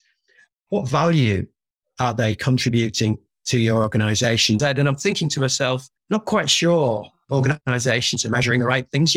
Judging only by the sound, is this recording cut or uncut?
cut